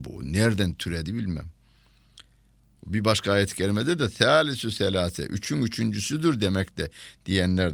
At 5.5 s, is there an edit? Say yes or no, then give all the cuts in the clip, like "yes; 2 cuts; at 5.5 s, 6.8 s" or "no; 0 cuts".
no; 1 cut; at 2.8 s